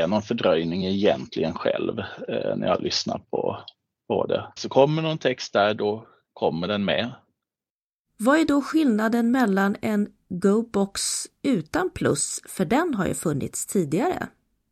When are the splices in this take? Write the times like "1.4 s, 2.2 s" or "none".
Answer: 4.6 s